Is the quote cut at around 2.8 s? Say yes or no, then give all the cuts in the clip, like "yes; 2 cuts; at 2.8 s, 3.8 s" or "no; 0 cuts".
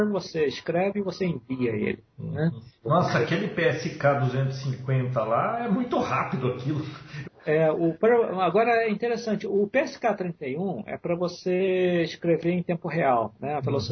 yes; 2 cuts; at 2.8 s, 7.2 s